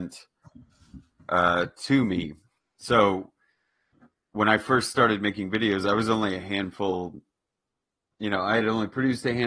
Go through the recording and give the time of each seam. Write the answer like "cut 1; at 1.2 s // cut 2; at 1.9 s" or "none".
none